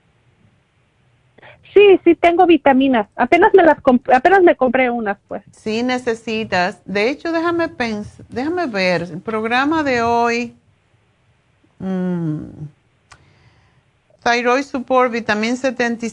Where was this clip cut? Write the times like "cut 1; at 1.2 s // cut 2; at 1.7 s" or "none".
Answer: cut 1; at 5.5 s

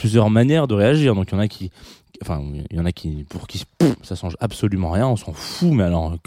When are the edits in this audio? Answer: none

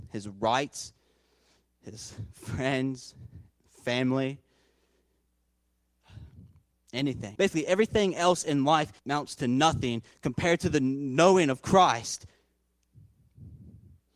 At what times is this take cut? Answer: cut 1; at 7.4 s // cut 2; at 9.0 s

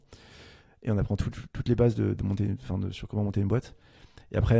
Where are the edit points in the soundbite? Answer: cut 1; at 2.1 s

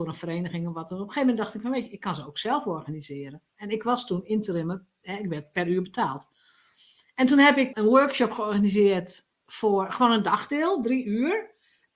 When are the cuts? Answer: cut 1; at 7.7 s

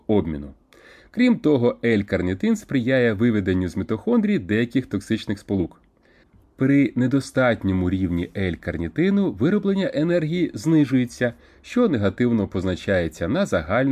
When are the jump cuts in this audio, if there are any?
none

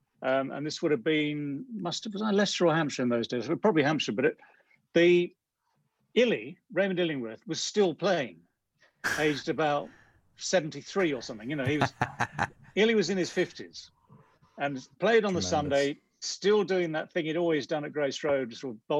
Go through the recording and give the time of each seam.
none

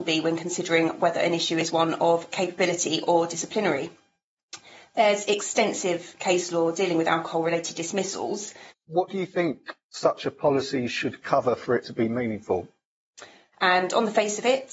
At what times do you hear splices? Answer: cut 1; at 8.7 s // cut 2; at 9.8 s // cut 3; at 13.5 s

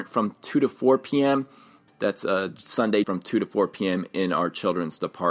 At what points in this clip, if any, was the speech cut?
cut 1; at 1.9 s // cut 2; at 3.0 s

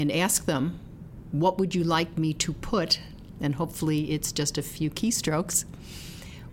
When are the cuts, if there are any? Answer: none

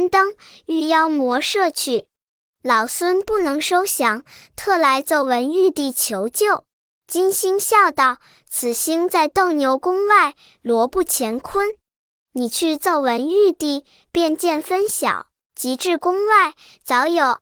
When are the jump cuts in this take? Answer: cut 1; at 6.7 s // cut 2; at 15.4 s

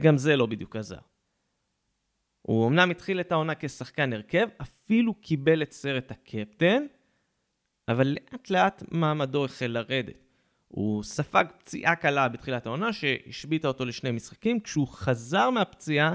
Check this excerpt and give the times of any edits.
none

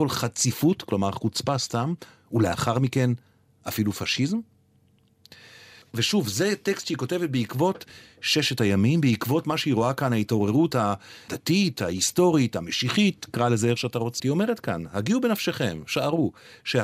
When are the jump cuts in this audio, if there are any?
cut 1; at 11.7 s // cut 2; at 14.2 s

